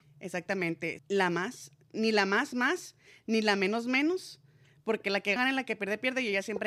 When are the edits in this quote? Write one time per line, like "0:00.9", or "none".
0:01.0
0:05.4